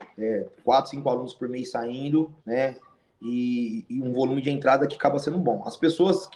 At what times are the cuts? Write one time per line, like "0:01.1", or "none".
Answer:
0:02.4